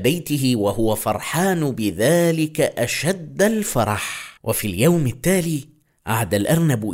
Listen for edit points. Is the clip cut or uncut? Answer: cut